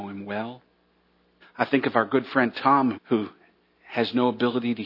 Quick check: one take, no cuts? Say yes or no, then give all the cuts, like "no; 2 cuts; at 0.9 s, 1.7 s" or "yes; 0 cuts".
no; 2 cuts; at 1.4 s, 2.9 s